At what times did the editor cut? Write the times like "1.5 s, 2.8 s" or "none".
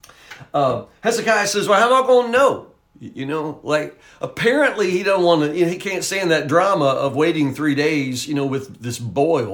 none